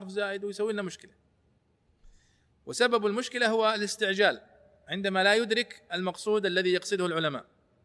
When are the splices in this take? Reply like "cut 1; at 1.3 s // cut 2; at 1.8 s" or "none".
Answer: none